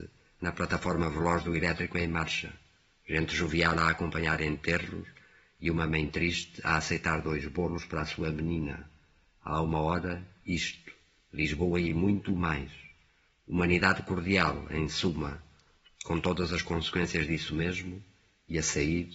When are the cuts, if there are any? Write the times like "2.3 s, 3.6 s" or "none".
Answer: none

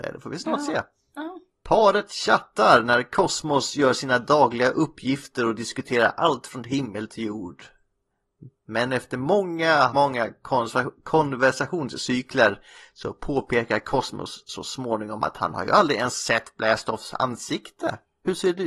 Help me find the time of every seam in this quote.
9.9 s

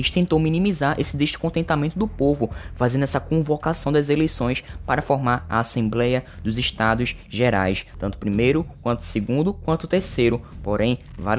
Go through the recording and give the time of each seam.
7.9 s

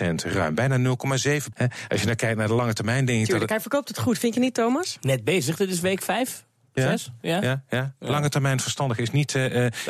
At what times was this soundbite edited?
1.5 s

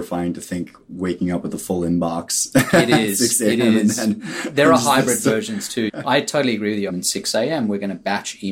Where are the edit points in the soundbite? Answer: 5.9 s, 6.9 s

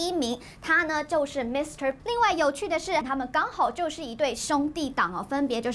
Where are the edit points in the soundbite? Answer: 2.0 s, 3.0 s

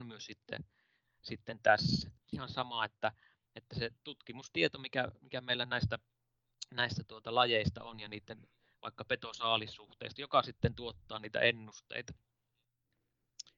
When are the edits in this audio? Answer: 2.3 s, 10.2 s

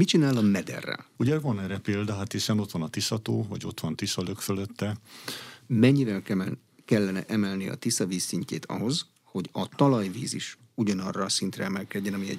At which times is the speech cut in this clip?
1.1 s, 5.6 s

